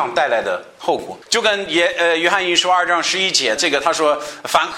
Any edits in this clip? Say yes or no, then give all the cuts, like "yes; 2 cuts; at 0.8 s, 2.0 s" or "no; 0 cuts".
yes; 2 cuts; at 1.2 s, 3.6 s